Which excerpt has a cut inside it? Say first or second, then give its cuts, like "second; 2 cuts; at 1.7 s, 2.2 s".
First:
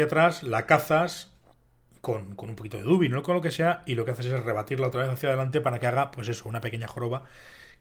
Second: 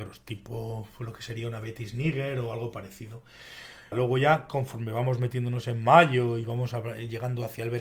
second; 1 cut; at 3.9 s